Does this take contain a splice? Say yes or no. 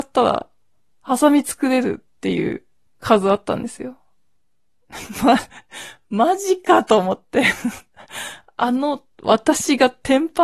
no